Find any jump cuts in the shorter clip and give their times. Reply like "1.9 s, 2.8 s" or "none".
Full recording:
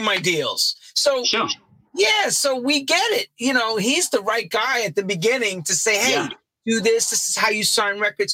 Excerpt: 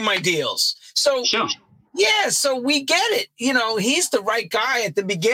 none